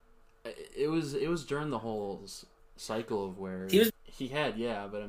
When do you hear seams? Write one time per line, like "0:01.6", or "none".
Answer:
0:03.9